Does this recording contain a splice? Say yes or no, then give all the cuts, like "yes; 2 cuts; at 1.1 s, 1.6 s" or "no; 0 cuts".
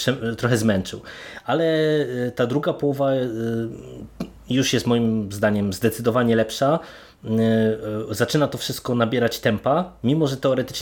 no; 0 cuts